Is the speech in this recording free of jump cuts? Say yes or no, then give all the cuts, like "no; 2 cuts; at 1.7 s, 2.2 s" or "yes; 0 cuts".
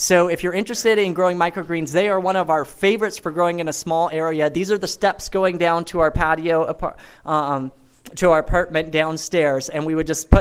yes; 0 cuts